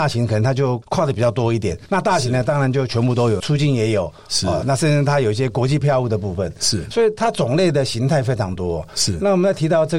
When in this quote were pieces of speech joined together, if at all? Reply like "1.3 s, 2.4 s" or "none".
3.4 s